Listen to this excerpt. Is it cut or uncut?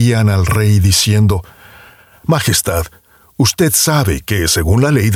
uncut